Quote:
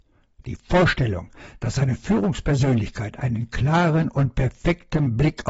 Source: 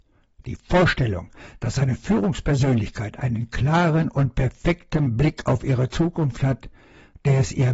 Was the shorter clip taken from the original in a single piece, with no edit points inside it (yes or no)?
yes